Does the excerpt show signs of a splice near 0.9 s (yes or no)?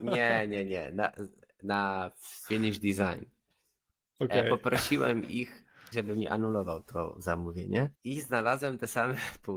no